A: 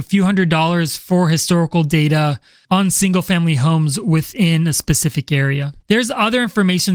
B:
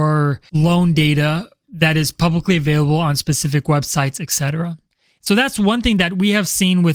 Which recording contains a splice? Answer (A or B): A